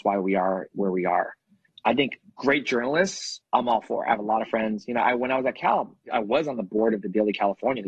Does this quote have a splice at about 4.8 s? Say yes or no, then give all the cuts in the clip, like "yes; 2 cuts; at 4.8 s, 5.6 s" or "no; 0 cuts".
no; 0 cuts